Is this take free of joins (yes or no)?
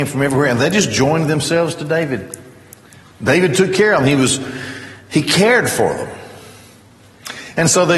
yes